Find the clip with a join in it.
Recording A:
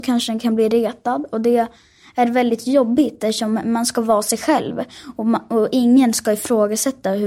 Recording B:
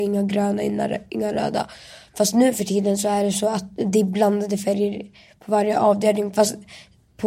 B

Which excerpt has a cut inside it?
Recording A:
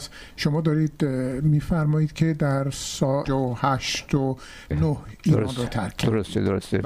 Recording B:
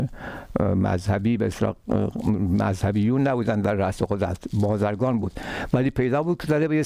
A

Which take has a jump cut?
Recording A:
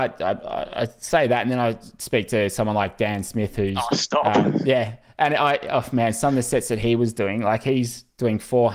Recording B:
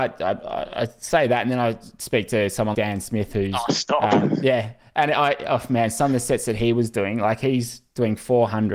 B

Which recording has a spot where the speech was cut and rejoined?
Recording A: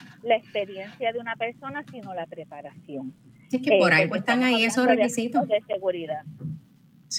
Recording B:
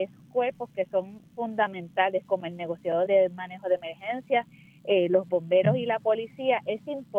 B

